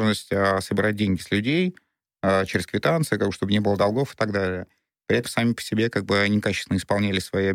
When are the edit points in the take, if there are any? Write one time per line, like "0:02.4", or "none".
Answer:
0:05.2